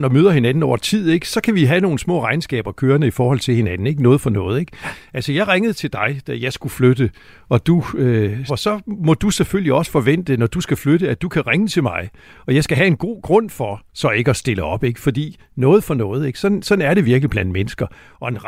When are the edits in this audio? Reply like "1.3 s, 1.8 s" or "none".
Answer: 8.5 s